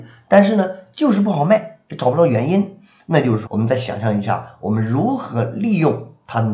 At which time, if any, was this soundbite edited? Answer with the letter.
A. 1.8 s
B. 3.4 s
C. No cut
B